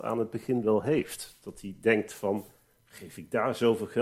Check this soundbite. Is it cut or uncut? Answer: uncut